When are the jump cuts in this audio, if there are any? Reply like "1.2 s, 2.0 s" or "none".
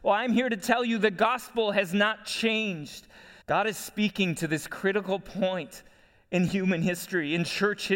3.4 s